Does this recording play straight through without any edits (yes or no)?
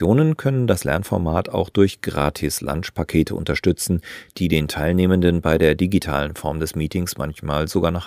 yes